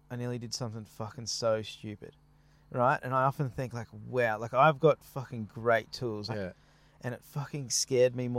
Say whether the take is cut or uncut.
cut